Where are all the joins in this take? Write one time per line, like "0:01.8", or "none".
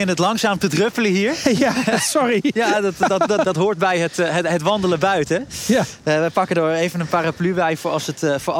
none